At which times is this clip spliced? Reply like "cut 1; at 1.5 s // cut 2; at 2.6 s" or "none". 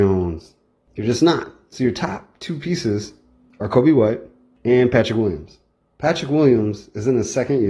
none